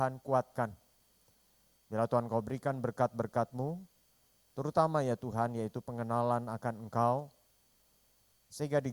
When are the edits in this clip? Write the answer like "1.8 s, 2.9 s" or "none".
none